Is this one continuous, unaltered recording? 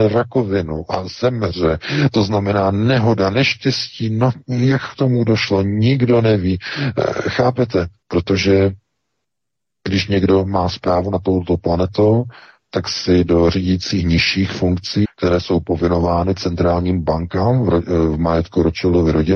no; 2 cuts; at 8.0 s, 15.0 s

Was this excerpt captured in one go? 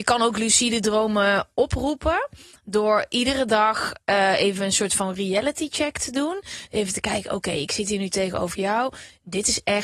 yes; 0 cuts

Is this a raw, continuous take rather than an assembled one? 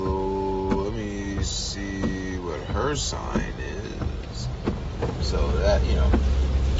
no; 1 cut; at 5.2 s

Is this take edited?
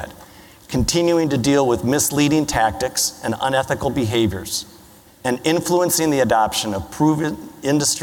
yes; 1 cut; at 5.1 s

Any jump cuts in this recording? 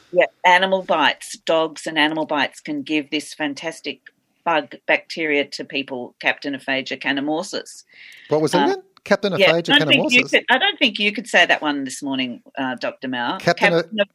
no; 0 cuts

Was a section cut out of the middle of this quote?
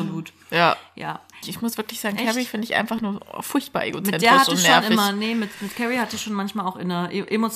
yes; 1 cut; at 1.4 s

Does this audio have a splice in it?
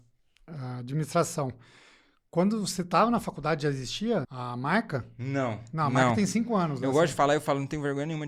yes; 1 cut; at 4.2 s

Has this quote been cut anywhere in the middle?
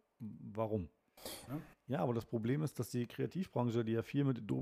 yes; 1 cut; at 1.5 s

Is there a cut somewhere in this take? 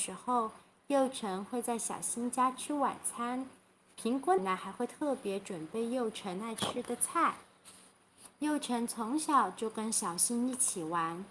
yes; 2 cuts; at 4.4 s, 8.3 s

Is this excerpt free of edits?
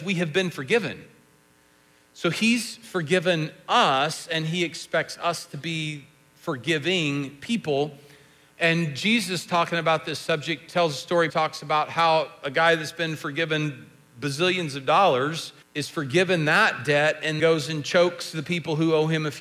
no; 3 cuts; at 11.3 s, 15.6 s, 17.4 s

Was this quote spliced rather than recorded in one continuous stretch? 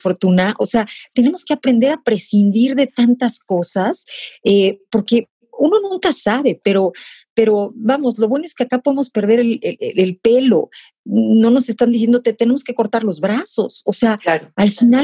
no; 0 cuts

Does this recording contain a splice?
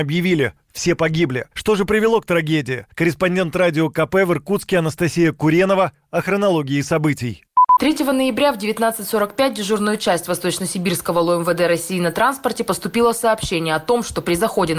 no; 0 cuts

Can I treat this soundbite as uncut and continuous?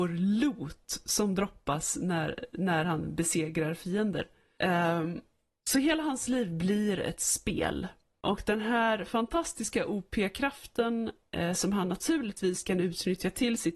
yes; 0 cuts

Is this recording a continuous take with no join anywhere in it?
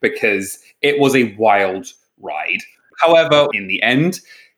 no; 1 cut; at 3.5 s

